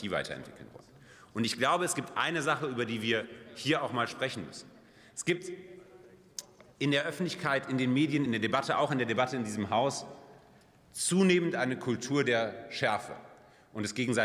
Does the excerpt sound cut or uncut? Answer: uncut